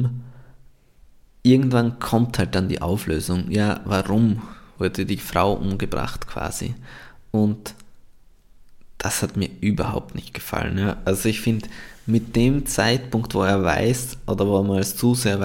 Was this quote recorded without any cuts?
yes; 0 cuts

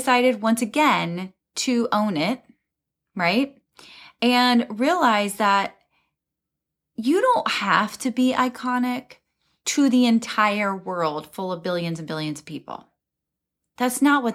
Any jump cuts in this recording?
no; 0 cuts

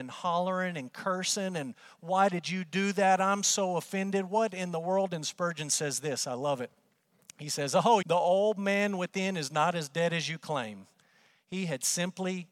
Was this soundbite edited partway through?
yes; 1 cut; at 8.0 s

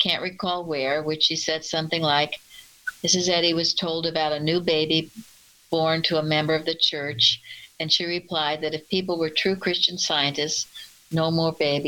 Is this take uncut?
yes; 0 cuts

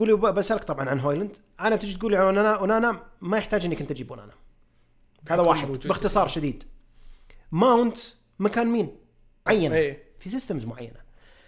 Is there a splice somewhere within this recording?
yes; 1 cut; at 9.5 s

